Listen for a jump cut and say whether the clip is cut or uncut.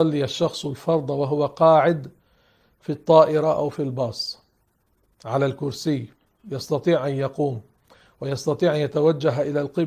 uncut